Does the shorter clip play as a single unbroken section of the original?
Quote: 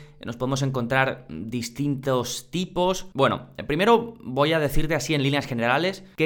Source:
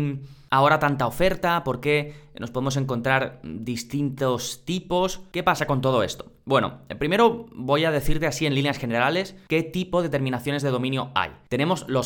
no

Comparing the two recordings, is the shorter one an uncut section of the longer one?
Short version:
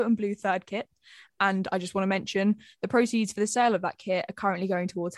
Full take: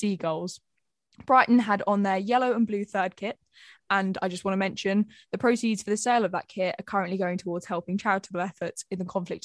yes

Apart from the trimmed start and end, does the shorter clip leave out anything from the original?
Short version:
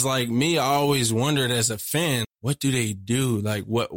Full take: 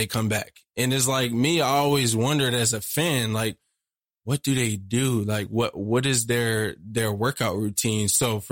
yes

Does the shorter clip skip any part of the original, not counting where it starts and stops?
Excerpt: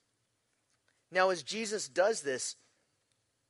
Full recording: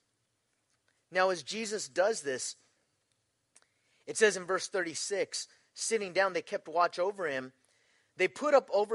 no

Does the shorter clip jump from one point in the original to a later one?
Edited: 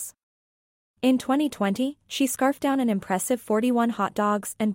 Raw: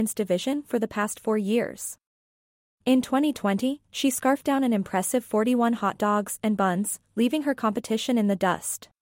no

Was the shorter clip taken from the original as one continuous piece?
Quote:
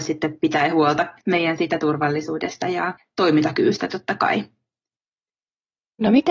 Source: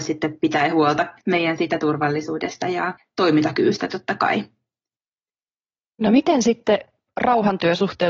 yes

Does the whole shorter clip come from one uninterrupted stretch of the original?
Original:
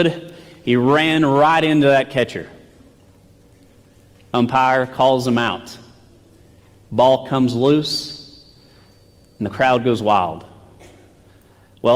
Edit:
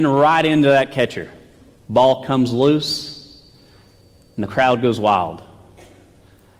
no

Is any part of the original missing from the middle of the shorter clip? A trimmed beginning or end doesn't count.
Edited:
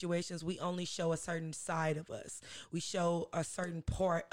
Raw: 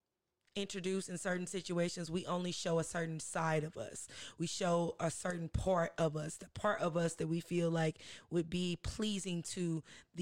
no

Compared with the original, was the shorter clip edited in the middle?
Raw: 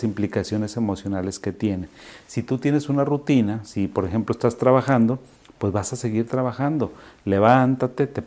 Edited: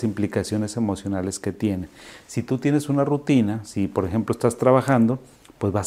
no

